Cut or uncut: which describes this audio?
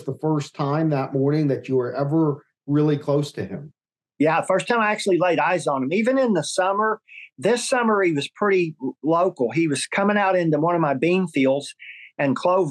uncut